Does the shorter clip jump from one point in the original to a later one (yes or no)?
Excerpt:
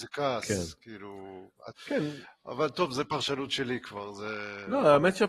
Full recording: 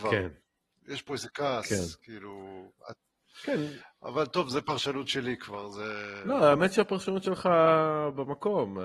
yes